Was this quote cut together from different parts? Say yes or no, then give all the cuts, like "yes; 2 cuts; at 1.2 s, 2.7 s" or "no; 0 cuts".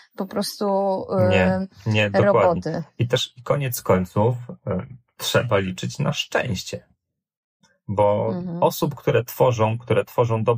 no; 0 cuts